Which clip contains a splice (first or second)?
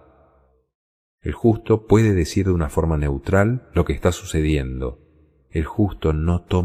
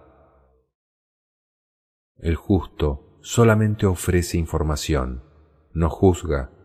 first